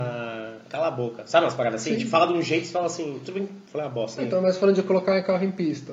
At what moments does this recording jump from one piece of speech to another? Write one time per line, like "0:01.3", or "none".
0:04.2